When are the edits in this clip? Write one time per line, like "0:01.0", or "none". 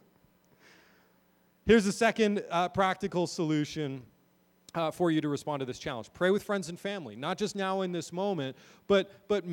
none